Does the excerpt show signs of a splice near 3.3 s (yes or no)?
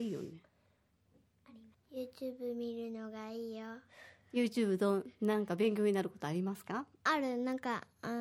no